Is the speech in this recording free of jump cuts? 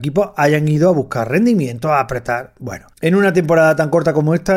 no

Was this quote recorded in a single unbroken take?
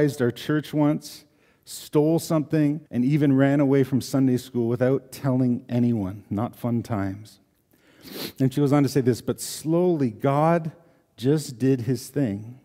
no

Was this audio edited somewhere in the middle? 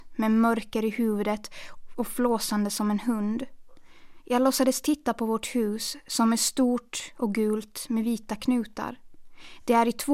yes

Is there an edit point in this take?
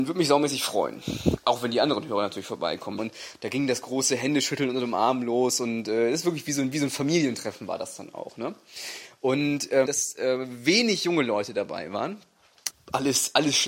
yes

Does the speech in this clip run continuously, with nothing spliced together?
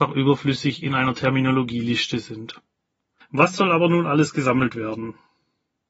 no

